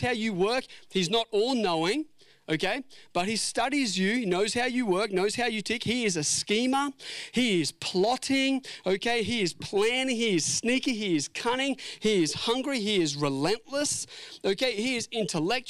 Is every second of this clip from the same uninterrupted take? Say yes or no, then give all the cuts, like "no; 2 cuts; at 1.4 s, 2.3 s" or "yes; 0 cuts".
yes; 0 cuts